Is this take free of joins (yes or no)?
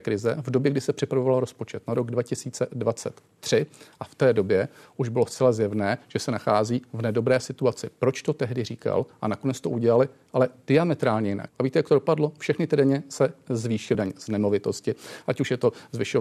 no